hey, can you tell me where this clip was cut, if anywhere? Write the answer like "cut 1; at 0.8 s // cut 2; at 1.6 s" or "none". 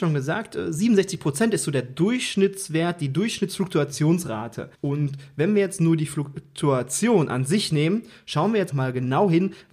cut 1; at 4.7 s // cut 2; at 8.7 s